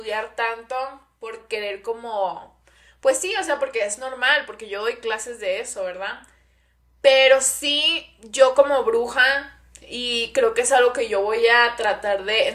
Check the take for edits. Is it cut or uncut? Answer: uncut